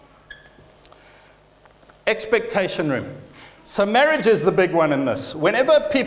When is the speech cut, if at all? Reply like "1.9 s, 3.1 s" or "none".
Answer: 3.6 s